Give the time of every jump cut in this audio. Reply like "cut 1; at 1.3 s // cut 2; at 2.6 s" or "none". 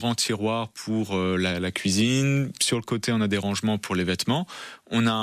none